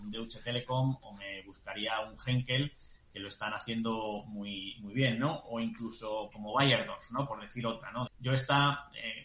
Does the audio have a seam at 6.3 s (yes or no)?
yes